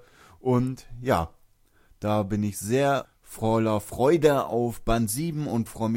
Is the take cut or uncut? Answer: cut